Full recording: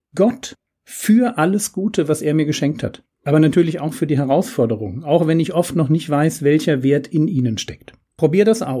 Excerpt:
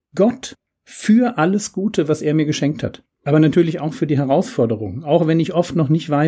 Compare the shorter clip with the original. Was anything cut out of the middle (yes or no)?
no